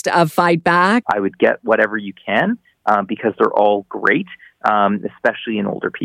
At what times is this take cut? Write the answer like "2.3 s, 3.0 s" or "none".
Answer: 1.0 s